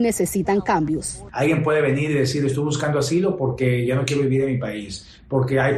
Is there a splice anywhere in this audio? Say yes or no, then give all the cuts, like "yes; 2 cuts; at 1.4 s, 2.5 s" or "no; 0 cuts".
no; 0 cuts